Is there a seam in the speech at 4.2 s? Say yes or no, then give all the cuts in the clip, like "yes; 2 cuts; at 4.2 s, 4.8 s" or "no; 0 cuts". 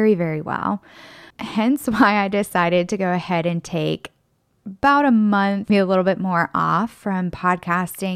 no; 2 cuts; at 1.3 s, 5.7 s